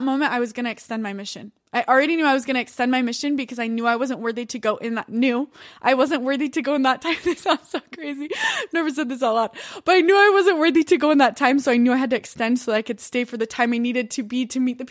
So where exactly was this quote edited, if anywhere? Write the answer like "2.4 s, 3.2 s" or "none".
none